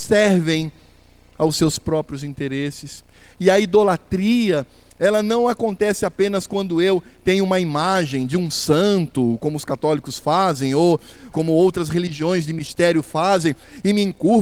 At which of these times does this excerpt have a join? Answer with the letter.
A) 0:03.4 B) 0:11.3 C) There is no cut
B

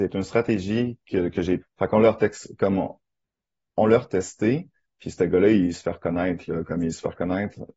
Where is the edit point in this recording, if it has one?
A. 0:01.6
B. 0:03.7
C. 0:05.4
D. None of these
A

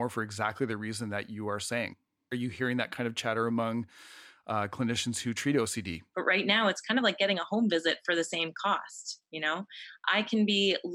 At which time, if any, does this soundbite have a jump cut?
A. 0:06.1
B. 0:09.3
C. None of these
A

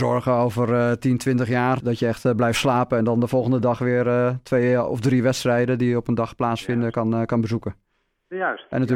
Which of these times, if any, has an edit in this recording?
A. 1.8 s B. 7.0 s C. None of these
A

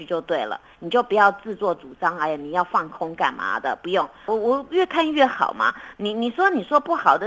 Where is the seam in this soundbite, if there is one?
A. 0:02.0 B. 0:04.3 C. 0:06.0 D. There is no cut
B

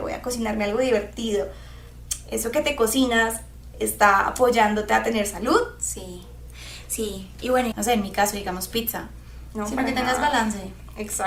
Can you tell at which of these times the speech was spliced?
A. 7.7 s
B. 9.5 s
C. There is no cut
A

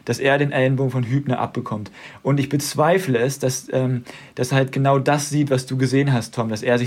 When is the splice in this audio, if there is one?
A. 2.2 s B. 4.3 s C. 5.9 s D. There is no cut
B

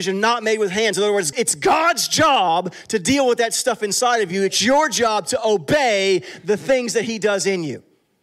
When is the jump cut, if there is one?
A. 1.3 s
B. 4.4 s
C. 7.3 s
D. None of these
A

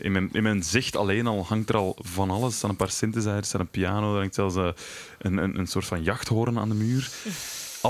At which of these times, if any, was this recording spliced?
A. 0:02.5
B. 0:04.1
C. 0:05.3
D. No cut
D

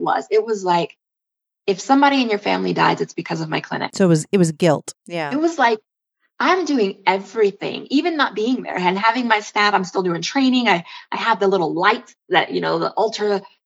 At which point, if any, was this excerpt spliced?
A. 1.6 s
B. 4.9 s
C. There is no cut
B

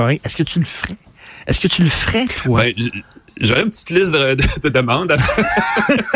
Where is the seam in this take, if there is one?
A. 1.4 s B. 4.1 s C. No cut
C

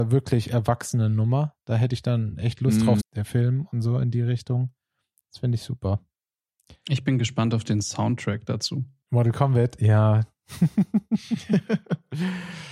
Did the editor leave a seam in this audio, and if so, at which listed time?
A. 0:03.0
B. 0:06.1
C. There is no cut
A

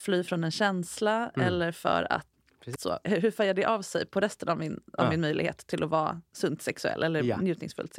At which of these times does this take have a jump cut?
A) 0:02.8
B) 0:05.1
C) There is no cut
A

